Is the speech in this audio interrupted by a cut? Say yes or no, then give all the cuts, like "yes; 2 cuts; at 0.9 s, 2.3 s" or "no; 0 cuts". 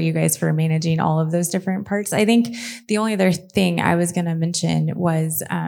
no; 0 cuts